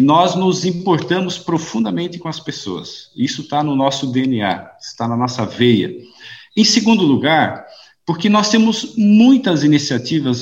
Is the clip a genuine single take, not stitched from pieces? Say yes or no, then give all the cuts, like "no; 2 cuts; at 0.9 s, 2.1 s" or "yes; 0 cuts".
yes; 0 cuts